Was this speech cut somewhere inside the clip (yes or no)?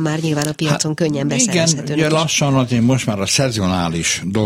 no